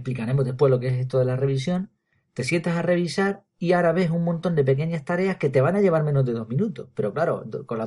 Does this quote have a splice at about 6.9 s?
no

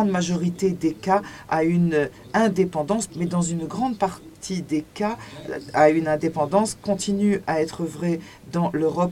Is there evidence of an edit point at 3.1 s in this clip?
yes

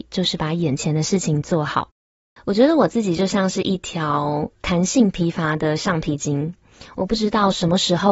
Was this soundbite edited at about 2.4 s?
yes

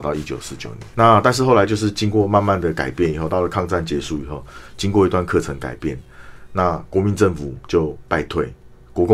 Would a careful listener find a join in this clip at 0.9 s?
yes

